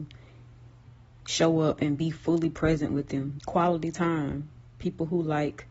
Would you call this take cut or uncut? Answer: cut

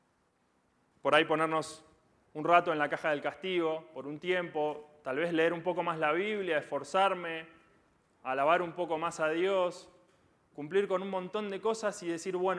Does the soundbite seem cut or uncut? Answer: uncut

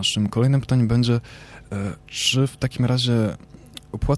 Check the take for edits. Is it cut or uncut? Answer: cut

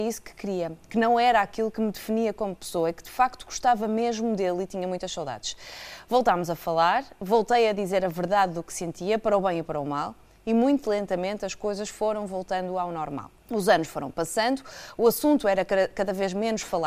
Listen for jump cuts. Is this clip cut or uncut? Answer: cut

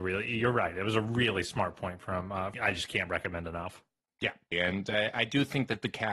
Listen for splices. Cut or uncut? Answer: cut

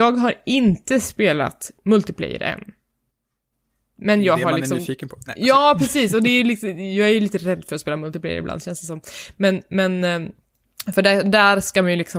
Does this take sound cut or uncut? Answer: uncut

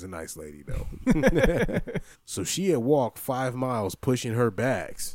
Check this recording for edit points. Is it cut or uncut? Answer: cut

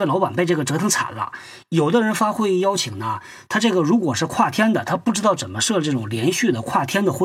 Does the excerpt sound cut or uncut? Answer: uncut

